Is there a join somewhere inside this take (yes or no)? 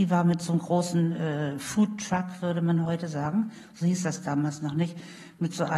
no